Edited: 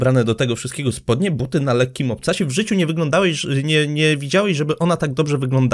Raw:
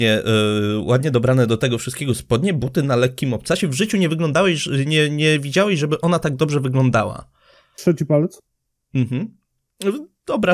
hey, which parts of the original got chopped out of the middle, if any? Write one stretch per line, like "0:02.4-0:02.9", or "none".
none

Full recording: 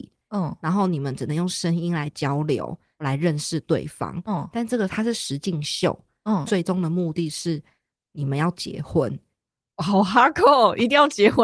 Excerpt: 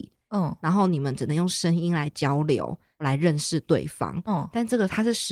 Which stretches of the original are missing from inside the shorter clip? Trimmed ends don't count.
none

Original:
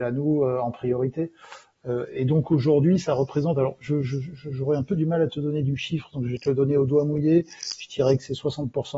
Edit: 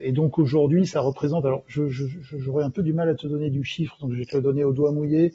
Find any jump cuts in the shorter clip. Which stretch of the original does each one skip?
none

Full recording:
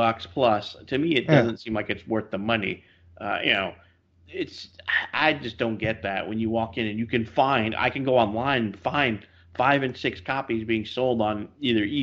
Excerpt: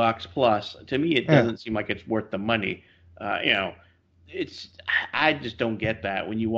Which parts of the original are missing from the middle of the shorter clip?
none

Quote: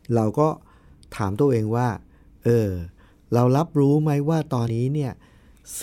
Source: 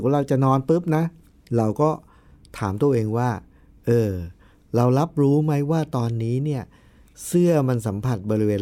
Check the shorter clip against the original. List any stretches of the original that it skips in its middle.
0:06.1-0:06.2

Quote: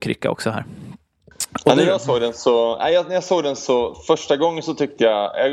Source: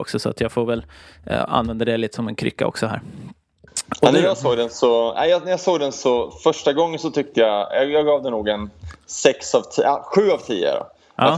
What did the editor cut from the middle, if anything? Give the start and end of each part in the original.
none

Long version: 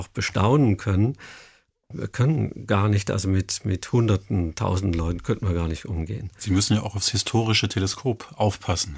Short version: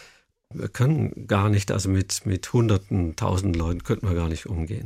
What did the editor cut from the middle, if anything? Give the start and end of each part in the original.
none

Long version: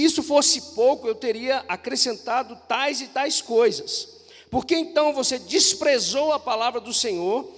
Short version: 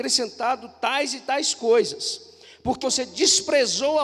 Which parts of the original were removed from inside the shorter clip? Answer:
0:04.7-0:05.1

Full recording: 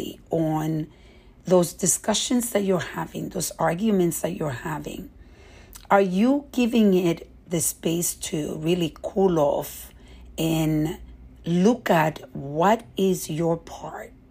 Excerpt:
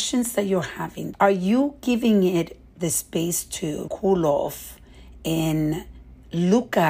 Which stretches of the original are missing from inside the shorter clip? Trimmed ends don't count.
0:03.3-0:05.8
0:08.6-0:09.0

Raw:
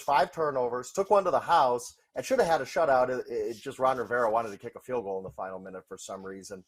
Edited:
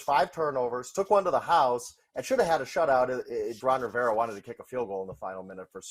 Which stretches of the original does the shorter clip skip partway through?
0:03.6-0:03.8

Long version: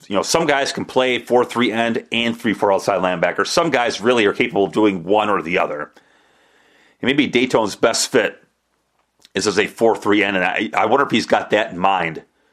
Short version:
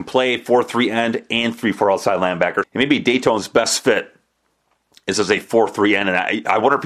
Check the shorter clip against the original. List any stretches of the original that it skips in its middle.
0:03.4-0:06.9

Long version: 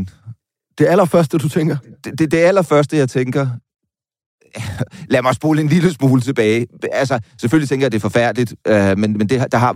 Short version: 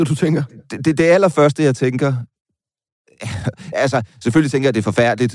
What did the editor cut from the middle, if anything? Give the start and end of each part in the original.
0:05.1-0:06.9

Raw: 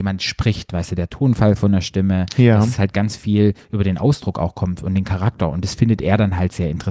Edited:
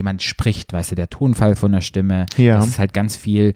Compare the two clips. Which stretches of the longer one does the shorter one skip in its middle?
none

